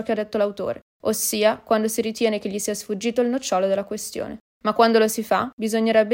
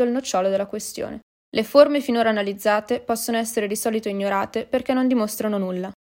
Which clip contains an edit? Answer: second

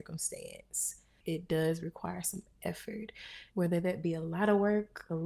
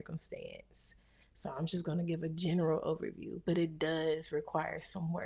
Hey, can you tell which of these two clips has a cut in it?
first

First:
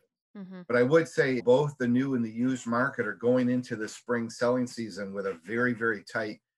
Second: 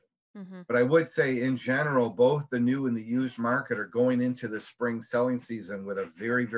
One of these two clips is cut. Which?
first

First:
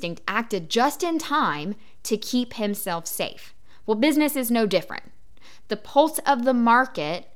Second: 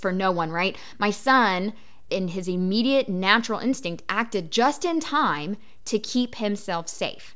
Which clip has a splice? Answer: second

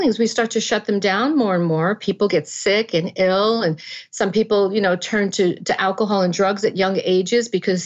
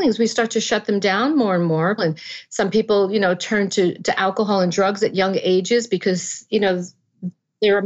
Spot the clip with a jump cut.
second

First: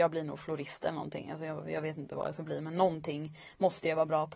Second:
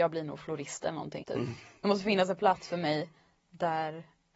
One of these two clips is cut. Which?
second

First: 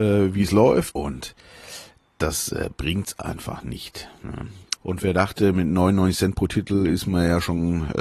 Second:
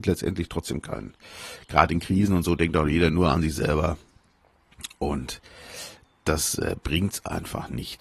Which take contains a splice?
first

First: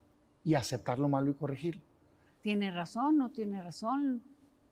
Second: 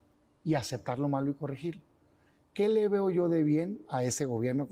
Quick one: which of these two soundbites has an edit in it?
first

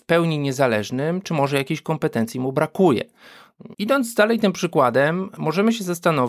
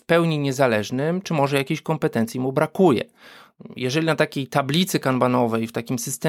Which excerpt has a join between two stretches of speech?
first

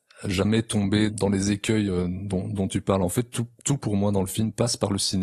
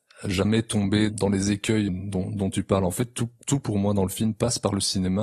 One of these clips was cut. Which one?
second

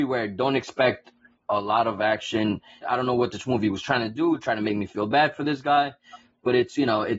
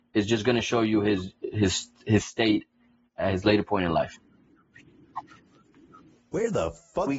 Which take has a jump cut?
first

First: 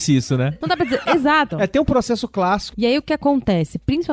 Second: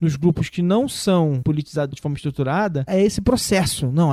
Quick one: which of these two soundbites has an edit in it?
first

